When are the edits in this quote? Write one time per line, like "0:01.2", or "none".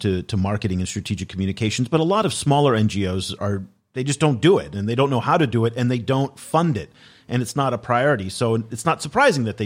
0:03.4

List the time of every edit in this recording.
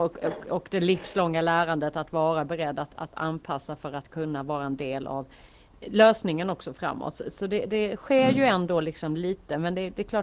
none

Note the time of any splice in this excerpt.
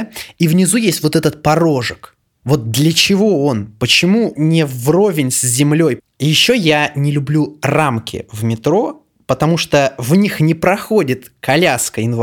0:04.3
0:06.0

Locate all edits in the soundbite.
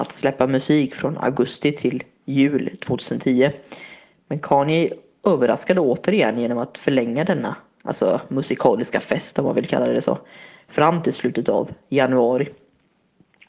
none

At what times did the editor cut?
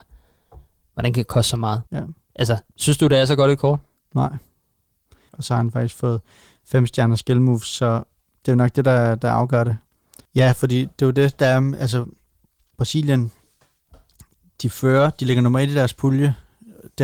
0:01.9
0:05.3
0:10.2

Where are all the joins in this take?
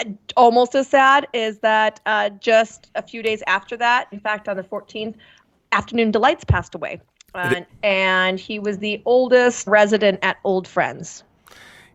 0:04.1
0:07.7
0:09.7

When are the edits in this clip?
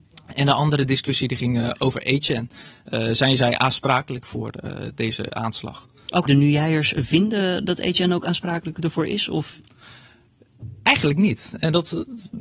0:06.3

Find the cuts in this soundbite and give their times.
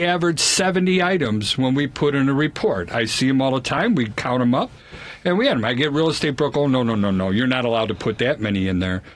none

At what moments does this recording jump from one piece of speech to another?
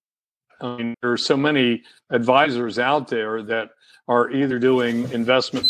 0:00.9

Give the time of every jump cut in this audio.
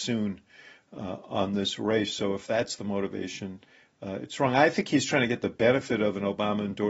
none

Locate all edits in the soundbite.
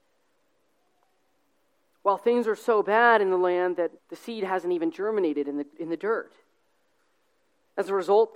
0:04.0
0:05.7

